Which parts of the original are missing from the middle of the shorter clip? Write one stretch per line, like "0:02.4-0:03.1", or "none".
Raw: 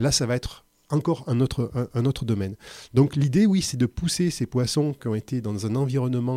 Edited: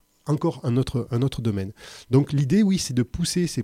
0:01.7-0:01.9

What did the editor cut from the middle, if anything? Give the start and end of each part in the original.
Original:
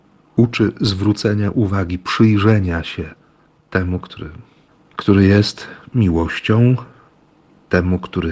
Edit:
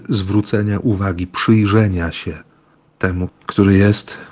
0:04.0-0:04.8

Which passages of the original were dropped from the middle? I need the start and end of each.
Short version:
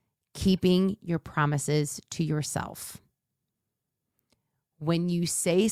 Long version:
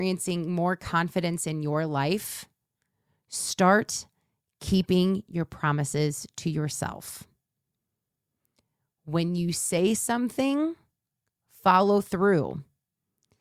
none

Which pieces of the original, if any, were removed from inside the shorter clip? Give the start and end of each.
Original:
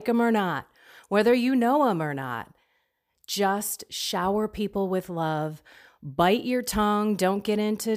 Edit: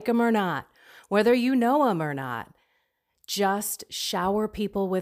none

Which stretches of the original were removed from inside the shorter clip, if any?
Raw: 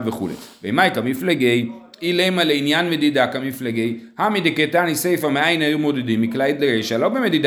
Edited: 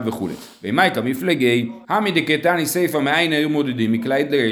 0:01.8-0:04.1

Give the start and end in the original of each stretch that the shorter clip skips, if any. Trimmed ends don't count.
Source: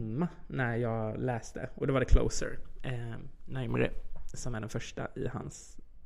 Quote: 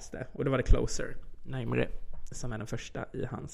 0:02.8-0:03.4

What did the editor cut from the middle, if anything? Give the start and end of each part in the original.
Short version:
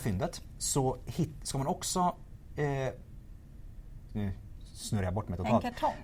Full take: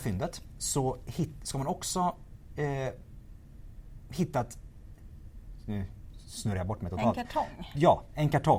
0:04.1-0:05.6

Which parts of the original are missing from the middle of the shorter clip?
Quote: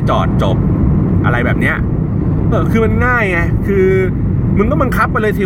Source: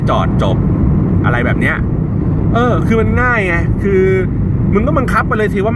0:02.5-0:02.7

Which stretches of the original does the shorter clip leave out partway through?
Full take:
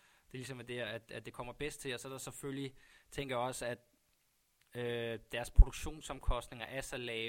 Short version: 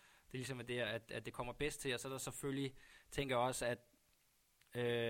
none

